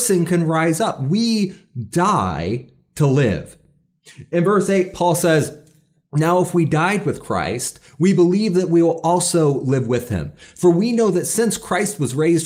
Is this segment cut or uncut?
uncut